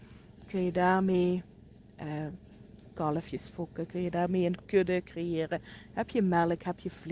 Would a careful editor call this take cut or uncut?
uncut